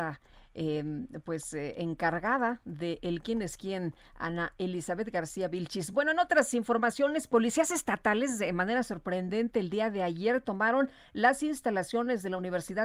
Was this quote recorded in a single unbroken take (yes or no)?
yes